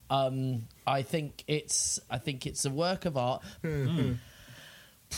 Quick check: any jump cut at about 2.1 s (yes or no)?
yes